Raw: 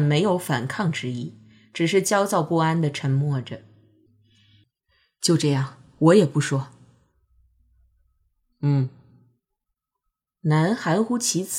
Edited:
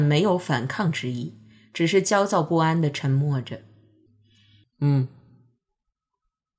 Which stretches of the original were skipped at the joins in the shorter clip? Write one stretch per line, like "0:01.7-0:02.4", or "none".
0:04.7-0:08.5